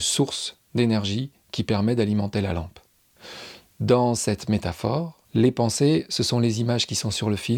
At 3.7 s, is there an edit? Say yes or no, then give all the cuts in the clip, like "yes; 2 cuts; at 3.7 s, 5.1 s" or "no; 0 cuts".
no; 1 cut; at 5.2 s